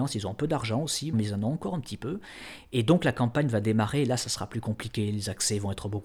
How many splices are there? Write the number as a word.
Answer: one